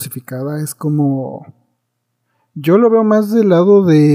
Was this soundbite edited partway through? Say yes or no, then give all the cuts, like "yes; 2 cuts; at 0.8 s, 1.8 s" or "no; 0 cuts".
no; 0 cuts